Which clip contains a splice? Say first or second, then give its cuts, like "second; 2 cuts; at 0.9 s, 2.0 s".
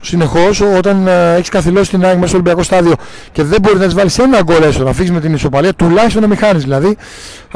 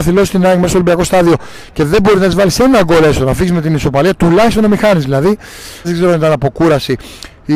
second; 1 cut; at 5.8 s